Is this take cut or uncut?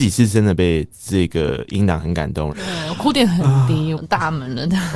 cut